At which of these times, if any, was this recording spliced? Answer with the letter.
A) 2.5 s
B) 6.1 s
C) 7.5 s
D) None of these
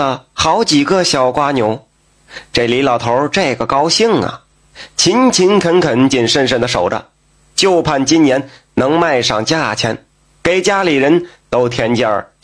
B